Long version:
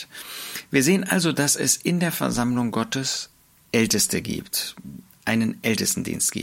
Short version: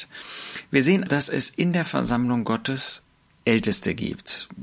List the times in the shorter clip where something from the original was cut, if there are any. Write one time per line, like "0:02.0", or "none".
0:01.1